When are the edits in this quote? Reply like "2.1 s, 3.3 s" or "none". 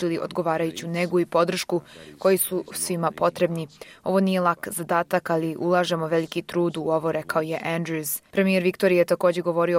none